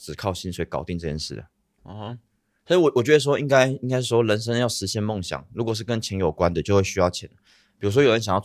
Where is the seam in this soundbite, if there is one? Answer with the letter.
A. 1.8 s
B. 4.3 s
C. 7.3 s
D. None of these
A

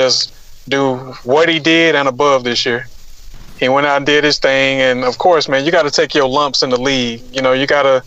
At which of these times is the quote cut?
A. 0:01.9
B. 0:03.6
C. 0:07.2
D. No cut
B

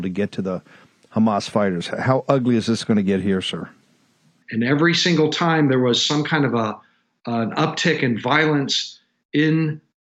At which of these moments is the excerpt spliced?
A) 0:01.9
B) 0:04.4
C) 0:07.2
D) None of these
B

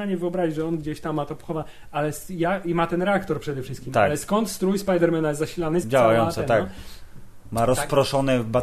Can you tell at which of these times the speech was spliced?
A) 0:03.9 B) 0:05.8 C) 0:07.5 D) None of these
B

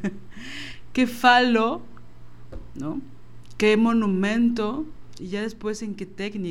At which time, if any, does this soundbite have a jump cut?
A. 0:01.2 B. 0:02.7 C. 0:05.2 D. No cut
C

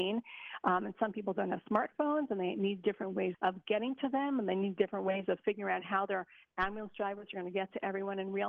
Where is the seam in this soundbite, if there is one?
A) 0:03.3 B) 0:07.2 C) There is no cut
A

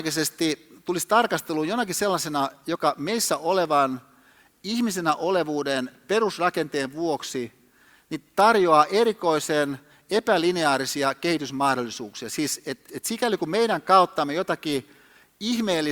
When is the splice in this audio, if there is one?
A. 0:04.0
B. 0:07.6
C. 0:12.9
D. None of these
C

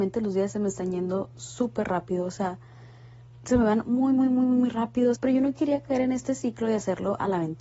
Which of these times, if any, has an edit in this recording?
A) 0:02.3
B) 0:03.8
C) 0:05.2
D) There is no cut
C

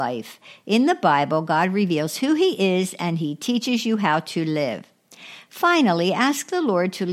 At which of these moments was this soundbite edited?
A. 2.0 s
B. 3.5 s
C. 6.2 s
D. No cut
D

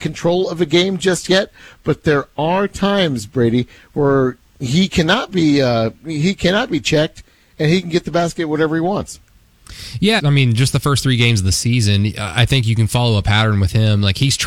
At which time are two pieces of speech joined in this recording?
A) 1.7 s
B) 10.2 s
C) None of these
B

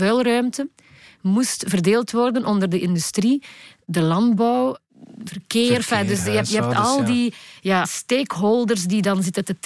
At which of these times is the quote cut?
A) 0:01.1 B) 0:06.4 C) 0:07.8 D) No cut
C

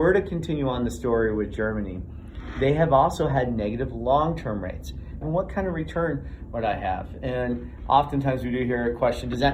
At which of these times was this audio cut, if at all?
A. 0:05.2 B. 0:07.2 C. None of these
A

